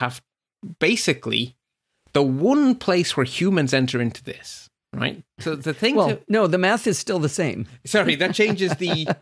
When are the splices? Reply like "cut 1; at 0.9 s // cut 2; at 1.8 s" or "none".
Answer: cut 1; at 5.3 s

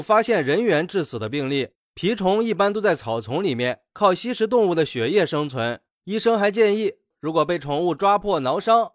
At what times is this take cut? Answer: cut 1; at 5.9 s // cut 2; at 7.1 s

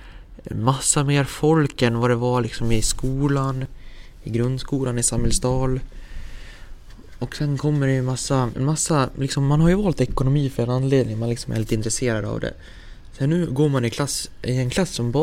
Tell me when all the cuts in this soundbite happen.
cut 1; at 8.5 s

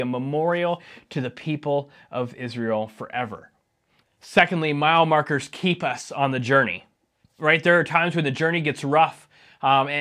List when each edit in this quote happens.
cut 1; at 4.0 s

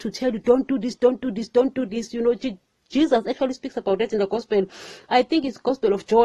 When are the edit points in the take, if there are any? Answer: none

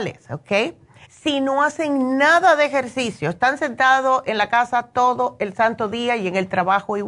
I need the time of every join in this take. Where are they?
cut 1; at 1.1 s

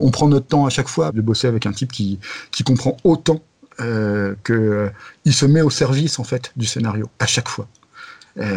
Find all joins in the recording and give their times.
cut 1; at 1.1 s

